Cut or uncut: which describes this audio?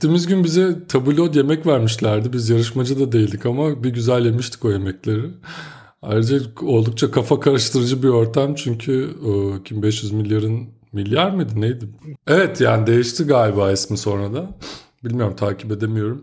cut